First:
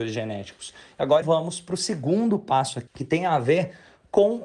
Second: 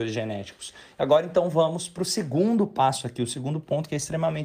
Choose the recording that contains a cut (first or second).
first